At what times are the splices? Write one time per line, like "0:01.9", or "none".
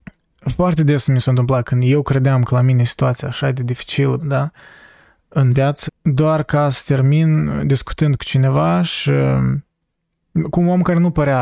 0:04.2
0:05.9